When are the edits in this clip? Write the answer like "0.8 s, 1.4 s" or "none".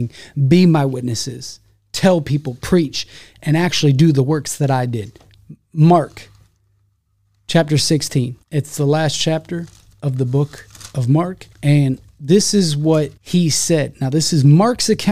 8.4 s, 11.5 s, 13.2 s

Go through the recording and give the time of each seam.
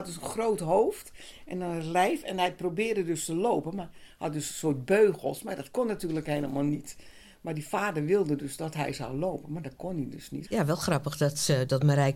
10.5 s

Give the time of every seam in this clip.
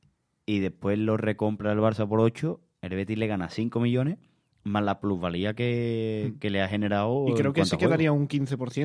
none

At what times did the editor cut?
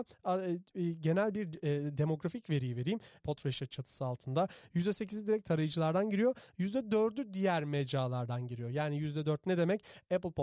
3.2 s

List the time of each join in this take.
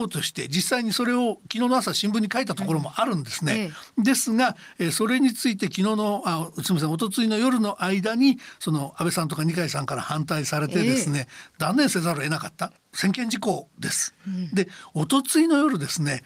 12.8 s

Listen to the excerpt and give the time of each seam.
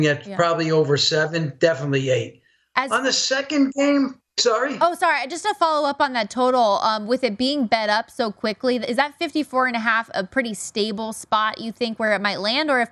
none

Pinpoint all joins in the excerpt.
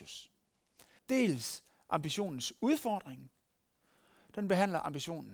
1.0 s

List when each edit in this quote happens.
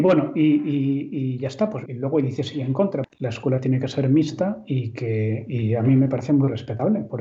1.9 s, 3.0 s

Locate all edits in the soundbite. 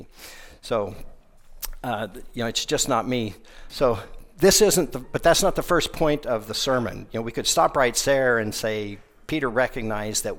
3.7 s

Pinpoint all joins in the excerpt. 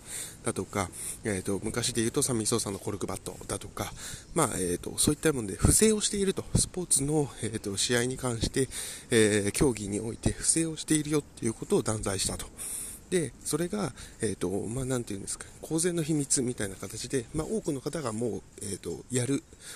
none

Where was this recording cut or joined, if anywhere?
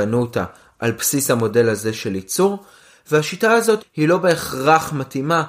3.8 s

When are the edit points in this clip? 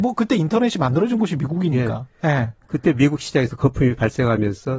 none

